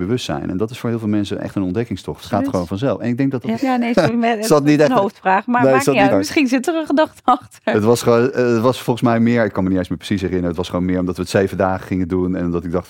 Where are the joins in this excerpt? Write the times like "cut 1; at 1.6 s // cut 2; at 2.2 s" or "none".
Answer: cut 1; at 2.2 s // cut 2; at 3.5 s // cut 3; at 6.1 s

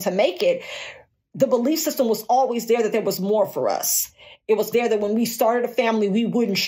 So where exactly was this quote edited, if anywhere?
cut 1; at 4.7 s

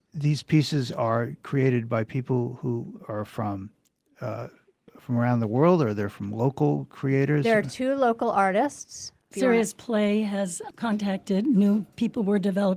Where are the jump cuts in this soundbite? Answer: cut 1; at 4.9 s // cut 2; at 9.3 s // cut 3; at 10.7 s

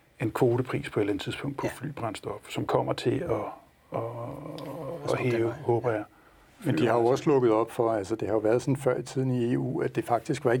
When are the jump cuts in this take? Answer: none

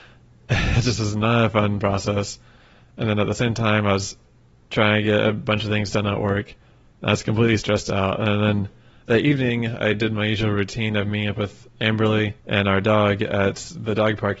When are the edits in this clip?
cut 1; at 12.4 s

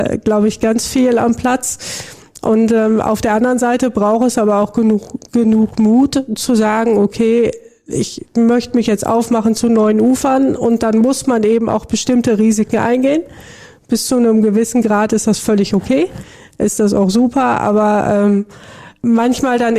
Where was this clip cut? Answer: none

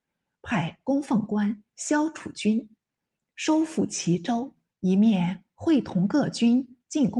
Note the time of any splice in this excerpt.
cut 1; at 4.7 s

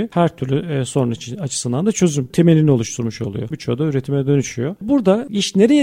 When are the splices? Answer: cut 1; at 3.5 s

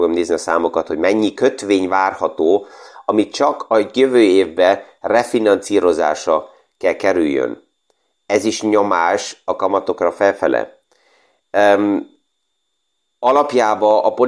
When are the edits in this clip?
none

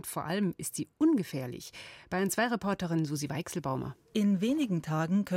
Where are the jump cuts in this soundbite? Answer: cut 1; at 4.1 s

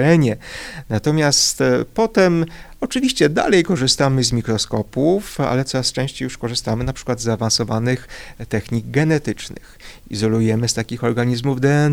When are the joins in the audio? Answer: none

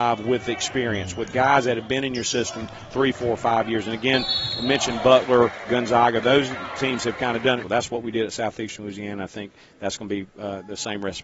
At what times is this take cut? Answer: cut 1; at 7.6 s

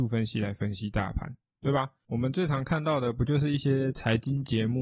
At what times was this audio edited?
none

